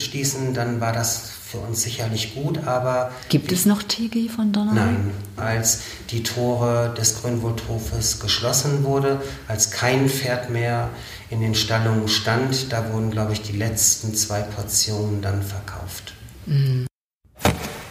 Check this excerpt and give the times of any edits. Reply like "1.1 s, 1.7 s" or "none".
5.4 s